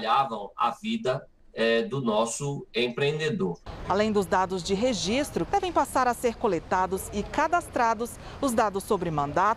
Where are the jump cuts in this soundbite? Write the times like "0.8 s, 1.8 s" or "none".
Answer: 3.9 s, 5.5 s